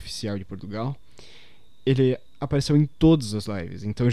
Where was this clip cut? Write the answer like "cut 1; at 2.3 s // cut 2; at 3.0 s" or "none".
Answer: none